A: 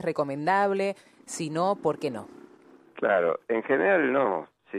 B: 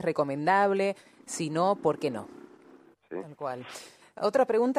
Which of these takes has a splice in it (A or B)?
B